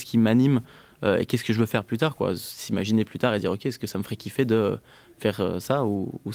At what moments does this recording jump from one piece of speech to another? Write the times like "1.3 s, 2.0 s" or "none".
none